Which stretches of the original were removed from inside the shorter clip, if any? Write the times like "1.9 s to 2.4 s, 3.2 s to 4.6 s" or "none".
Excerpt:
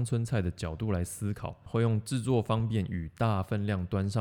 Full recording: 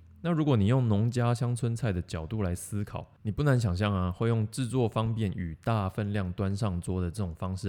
3.2 s to 4.1 s